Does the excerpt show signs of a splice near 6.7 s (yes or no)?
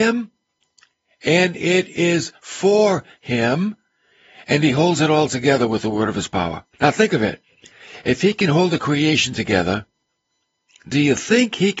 yes